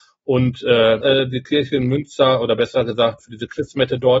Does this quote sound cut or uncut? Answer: cut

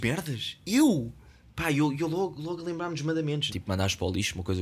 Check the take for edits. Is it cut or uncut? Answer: cut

